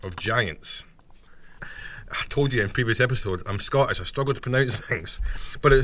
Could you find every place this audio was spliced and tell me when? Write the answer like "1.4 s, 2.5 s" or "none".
1.6 s

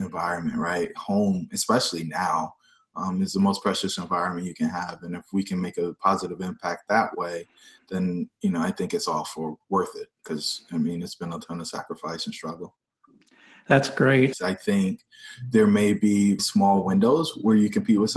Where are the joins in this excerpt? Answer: 14.3 s, 16.4 s

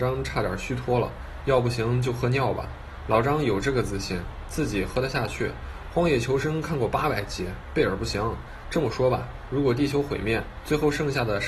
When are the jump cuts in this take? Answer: 1.4 s

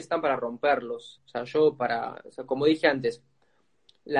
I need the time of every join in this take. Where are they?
1.2 s

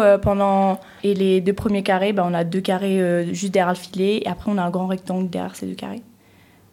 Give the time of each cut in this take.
1.0 s

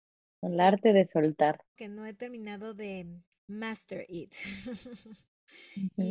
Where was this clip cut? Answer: 1.8 s

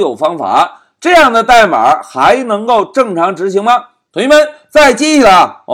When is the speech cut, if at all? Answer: 4.1 s

